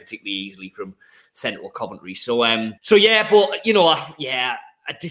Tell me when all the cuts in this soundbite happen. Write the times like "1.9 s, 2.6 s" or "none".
2.8 s